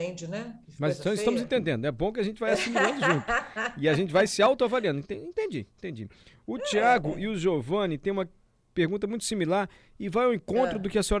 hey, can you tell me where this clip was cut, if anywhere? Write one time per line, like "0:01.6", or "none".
none